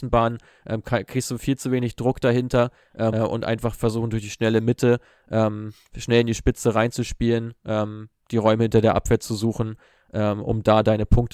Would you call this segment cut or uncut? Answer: cut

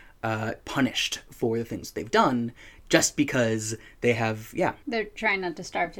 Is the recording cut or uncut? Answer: cut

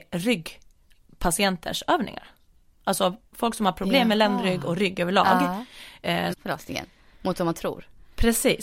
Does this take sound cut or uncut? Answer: cut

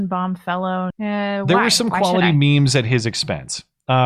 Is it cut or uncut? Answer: cut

